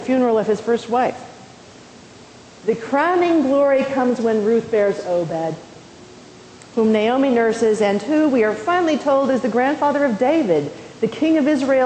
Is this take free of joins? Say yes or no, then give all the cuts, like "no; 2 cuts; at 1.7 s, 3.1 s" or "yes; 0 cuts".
no; 1 cut; at 2.6 s